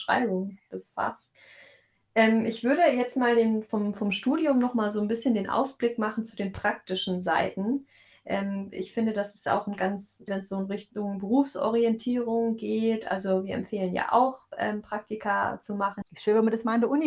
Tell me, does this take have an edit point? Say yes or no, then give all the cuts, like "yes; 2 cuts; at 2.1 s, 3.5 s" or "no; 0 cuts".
yes; 2 cuts; at 10.3 s, 16.0 s